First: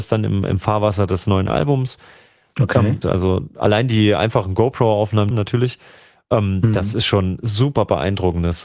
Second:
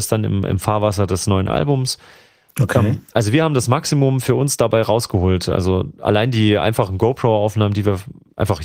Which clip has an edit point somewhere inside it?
first; 2 cuts; at 3.0 s, 5.3 s

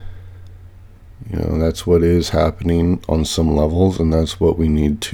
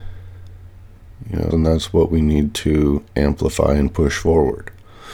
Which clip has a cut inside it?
second; 1 cut; at 1.5 s

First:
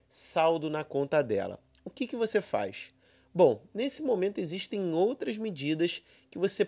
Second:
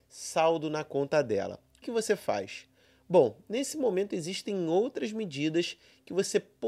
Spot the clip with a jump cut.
second; 1 cut; at 1.8 s

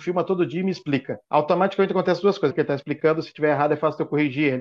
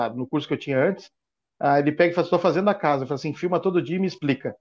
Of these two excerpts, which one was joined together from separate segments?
first; 2 cuts; at 1.2 s, 2.5 s

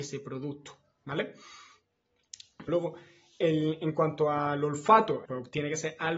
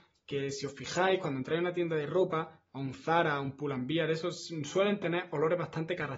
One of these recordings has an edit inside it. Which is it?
first; 2 cuts; at 2.7 s, 5.3 s

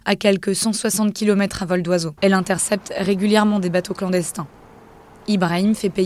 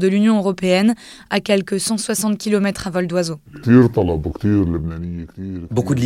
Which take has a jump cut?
first; 1 cut; at 2.2 s

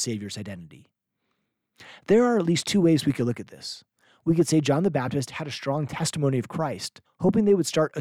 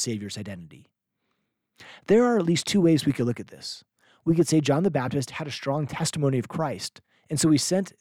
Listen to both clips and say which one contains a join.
first; 1 cut; at 7.1 s

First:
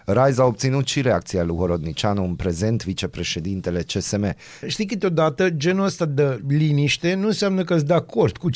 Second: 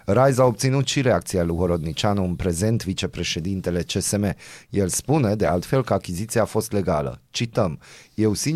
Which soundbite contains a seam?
first; 1 cut; at 4.6 s

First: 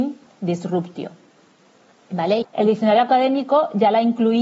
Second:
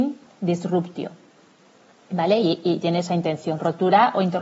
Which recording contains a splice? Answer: first; 1 cut; at 2.4 s

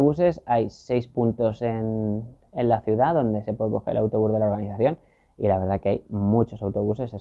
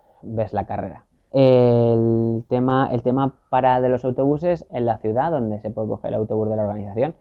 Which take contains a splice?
second; 2 cuts; at 1.3 s, 4.7 s

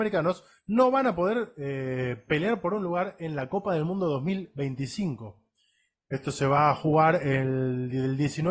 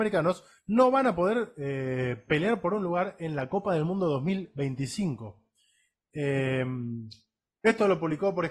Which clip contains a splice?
first; 1 cut; at 6.0 s

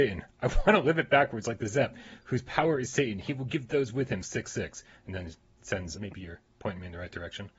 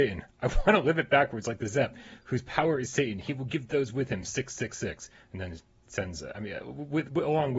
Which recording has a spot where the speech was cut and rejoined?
first; 2 cuts; at 4.2 s, 5.9 s

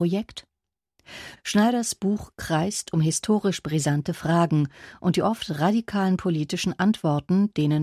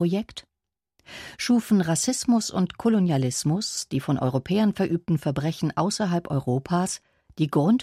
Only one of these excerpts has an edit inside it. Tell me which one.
first; 1 cut; at 1.4 s

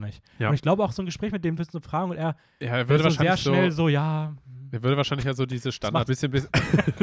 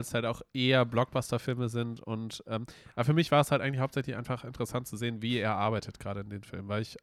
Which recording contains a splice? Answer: first; 2 cuts; at 1.6 s, 6.1 s

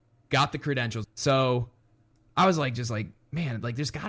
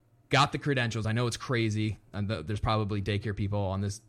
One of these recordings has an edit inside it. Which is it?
first; 1 cut; at 1.0 s

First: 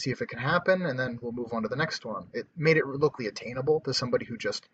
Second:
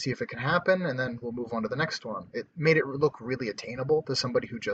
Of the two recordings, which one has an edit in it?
first; 1 cut; at 3.2 s

